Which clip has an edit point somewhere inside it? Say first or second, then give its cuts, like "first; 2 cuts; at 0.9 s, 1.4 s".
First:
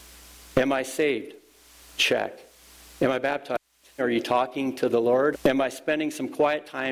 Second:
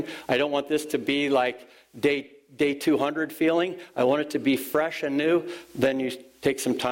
first; 2 cuts; at 4.0 s, 5.3 s